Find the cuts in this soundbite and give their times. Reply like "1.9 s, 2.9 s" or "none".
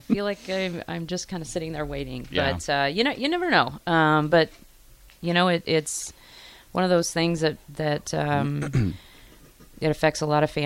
none